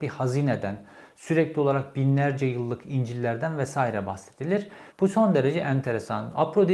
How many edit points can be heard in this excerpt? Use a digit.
1